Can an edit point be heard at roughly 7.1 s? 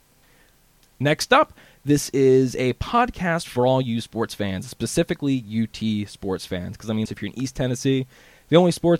yes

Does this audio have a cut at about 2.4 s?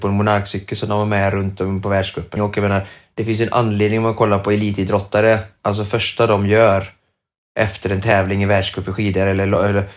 yes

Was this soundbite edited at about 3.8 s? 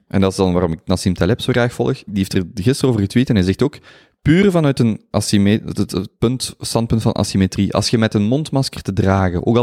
no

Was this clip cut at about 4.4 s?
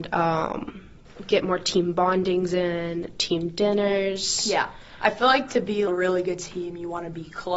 no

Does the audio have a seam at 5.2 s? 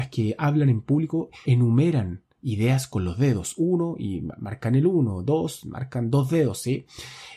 no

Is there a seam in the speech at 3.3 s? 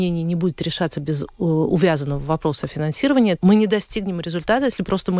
yes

